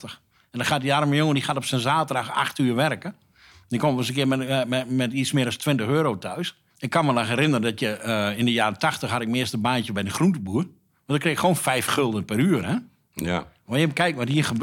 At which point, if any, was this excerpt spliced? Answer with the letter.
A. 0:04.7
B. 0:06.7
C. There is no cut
B